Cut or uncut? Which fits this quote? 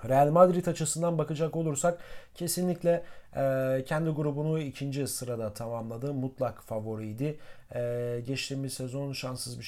uncut